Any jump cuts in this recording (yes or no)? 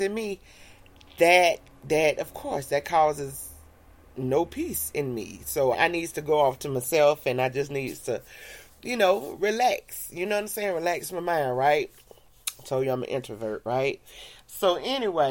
yes